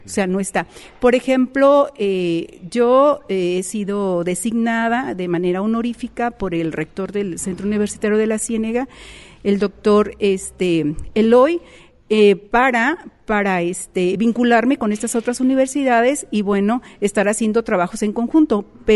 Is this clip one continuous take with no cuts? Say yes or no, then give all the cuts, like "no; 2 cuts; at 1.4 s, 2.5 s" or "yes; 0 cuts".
yes; 0 cuts